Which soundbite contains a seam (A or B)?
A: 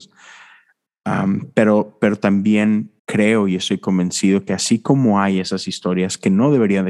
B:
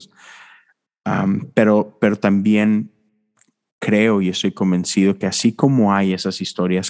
A